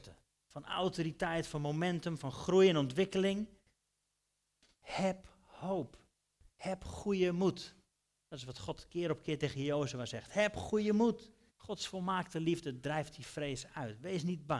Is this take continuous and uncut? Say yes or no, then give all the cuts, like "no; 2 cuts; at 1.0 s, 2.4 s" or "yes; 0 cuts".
no; 3 cuts; at 2.2 s, 4.7 s, 11.5 s